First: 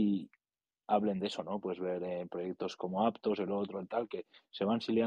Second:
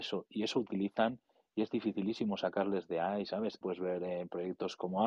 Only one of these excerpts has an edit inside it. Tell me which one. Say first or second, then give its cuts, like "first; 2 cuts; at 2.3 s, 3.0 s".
second; 1 cut; at 3.6 s